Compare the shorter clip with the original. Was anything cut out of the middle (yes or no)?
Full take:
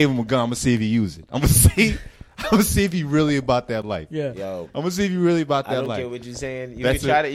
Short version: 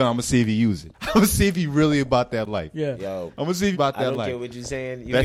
yes